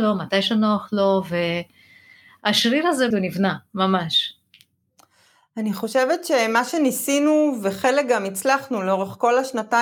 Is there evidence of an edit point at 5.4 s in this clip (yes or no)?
no